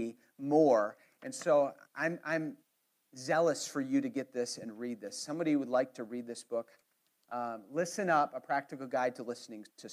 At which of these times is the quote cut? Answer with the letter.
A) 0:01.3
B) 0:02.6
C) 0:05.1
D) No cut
D